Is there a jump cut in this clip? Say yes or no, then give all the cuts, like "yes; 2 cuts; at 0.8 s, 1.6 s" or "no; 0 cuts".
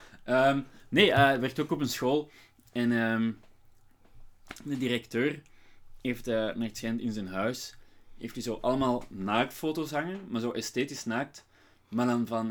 no; 0 cuts